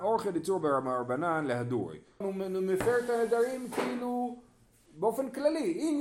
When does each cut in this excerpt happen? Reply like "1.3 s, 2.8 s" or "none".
2.2 s

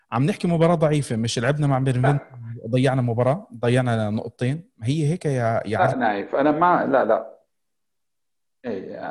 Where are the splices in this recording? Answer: none

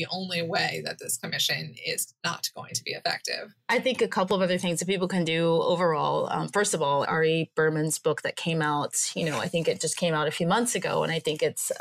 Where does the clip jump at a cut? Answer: 7.0 s

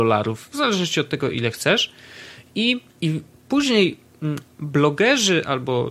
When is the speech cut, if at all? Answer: 2.9 s

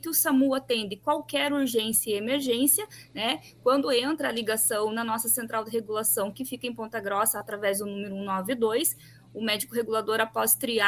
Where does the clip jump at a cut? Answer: none

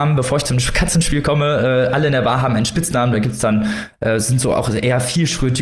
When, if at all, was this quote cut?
none

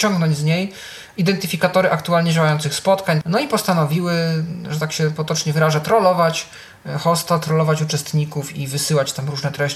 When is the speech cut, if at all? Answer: 3.2 s

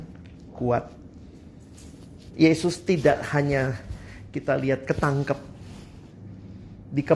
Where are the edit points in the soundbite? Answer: 2.3 s

